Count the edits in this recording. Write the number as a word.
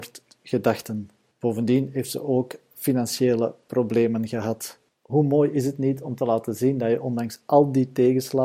zero